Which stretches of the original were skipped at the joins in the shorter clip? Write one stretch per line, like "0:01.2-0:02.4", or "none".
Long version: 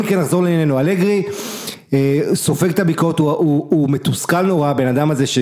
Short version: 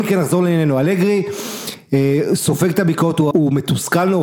0:03.3-0:03.7